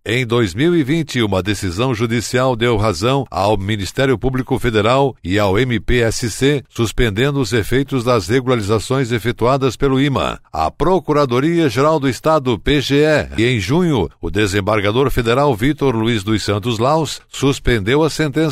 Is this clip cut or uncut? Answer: cut